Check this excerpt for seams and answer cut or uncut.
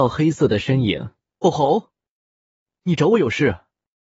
cut